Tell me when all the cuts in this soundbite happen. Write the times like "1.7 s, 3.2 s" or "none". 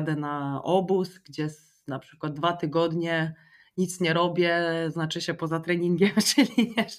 none